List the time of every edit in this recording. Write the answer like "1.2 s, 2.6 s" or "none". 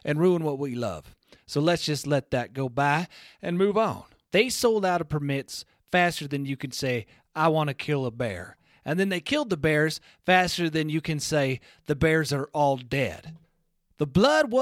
4.2 s